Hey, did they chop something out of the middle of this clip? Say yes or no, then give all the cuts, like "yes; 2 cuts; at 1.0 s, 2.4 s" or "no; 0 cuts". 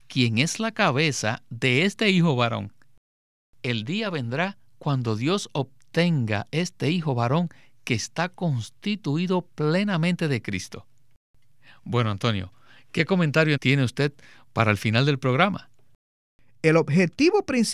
yes; 1 cut; at 13.6 s